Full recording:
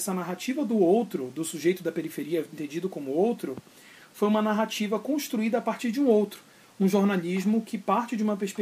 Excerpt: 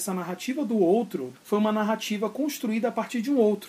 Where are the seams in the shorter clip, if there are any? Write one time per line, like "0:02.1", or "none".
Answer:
0:01.3